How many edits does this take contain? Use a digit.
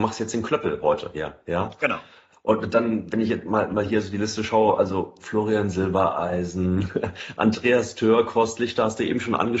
1